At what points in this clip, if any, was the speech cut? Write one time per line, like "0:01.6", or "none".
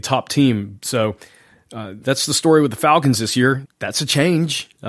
0:02.0
0:03.6